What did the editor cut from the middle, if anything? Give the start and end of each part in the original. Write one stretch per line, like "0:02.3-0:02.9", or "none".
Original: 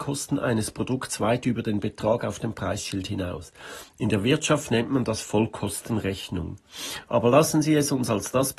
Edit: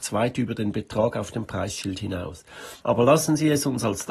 0:03.9-0:07.1